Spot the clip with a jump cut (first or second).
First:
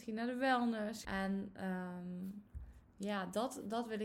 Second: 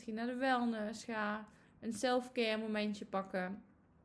first